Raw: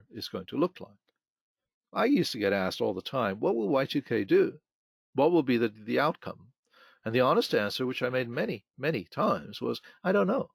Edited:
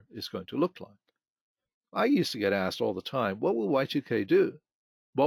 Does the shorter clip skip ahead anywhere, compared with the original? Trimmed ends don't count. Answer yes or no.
no